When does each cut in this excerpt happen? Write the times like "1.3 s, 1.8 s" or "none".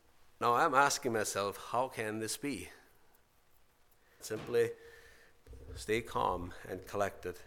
4.2 s